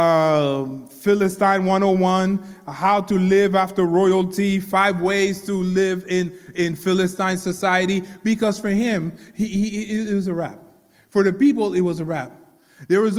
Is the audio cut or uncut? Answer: uncut